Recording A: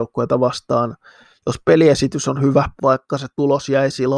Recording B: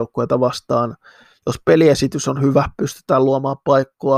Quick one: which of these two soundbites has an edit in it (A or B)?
A